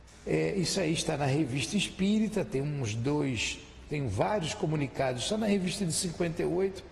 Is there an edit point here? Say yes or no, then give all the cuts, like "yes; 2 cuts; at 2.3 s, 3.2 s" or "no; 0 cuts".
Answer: no; 0 cuts